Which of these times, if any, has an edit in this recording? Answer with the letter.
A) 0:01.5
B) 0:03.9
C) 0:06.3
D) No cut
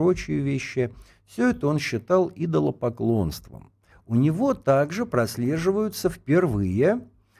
B